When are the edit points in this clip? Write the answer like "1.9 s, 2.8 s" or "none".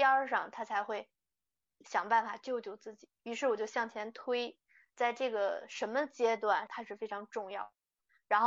3.2 s, 4.9 s, 6.7 s